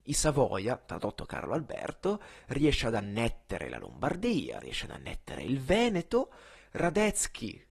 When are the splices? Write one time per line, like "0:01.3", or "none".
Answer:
0:06.6